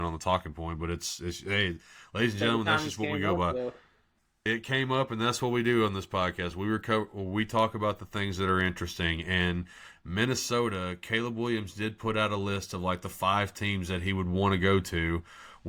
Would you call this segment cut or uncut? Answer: cut